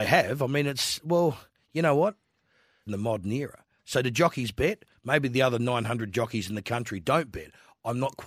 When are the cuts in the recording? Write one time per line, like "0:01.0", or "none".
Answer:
0:02.9
0:05.0